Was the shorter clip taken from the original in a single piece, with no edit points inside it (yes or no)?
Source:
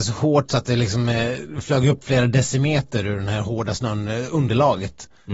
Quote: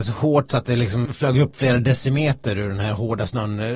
no